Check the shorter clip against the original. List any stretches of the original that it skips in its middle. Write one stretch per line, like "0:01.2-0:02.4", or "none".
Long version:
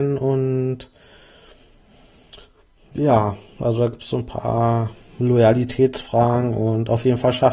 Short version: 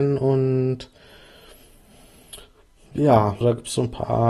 0:03.4-0:03.8